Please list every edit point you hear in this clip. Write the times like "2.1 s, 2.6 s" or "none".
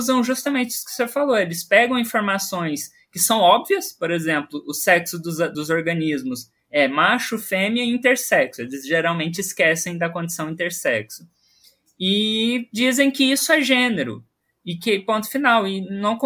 none